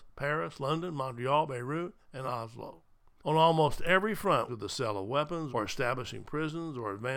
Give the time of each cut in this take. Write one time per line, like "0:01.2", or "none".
0:03.2
0:04.5
0:05.5